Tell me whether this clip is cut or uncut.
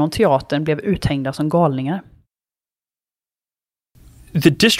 uncut